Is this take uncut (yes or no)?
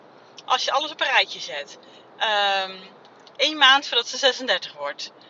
no